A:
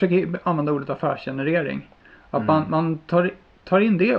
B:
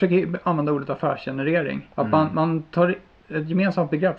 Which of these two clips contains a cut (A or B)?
B